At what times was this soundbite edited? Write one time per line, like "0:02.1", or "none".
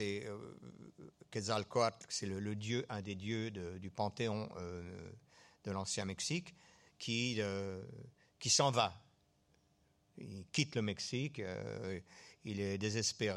none